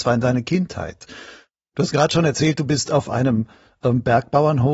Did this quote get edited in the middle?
no; 0 cuts

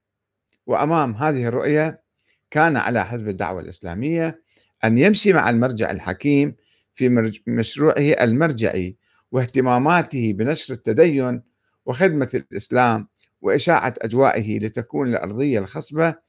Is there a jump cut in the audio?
no; 0 cuts

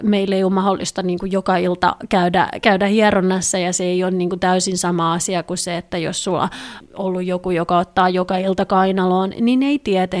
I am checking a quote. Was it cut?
no; 0 cuts

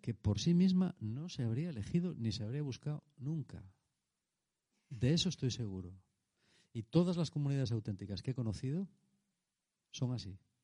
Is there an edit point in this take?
no; 0 cuts

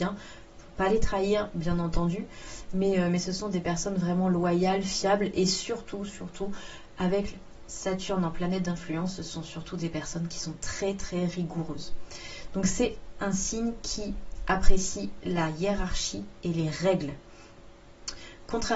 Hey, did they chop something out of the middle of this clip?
no; 0 cuts

